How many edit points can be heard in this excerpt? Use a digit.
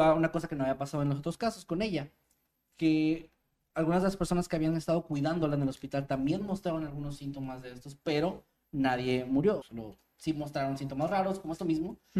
1